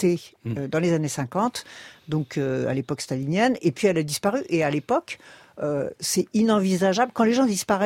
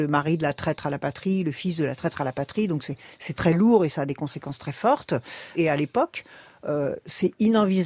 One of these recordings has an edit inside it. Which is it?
second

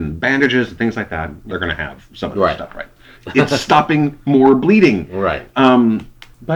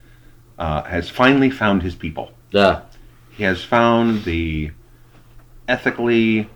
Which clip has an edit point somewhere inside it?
first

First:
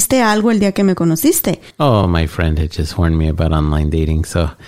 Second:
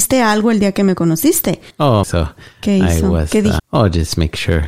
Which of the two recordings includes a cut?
second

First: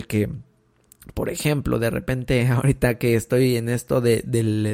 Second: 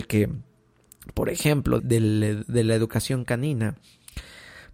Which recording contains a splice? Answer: second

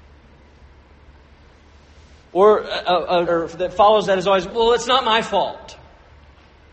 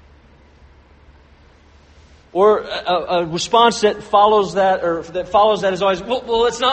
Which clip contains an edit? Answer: first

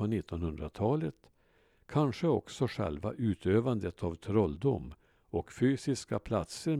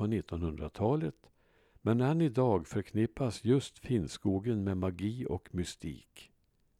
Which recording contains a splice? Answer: second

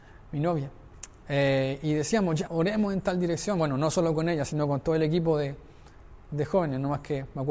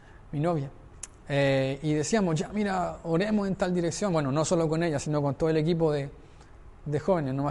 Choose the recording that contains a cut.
first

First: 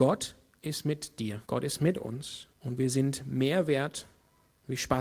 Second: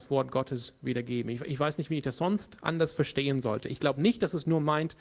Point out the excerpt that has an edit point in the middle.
first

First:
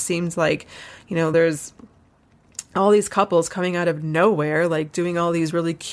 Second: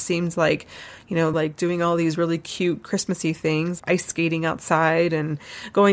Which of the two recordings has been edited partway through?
second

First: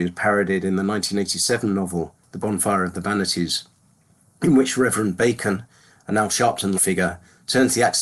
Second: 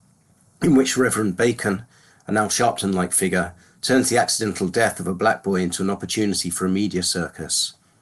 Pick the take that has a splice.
first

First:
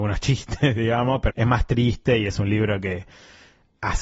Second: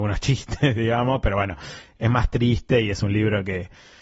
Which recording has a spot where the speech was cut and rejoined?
first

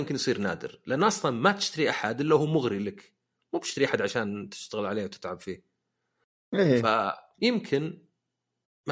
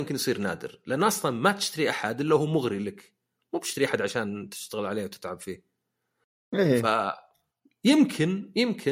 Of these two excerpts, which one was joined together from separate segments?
first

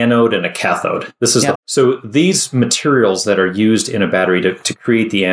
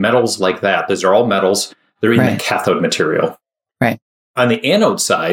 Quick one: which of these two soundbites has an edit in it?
first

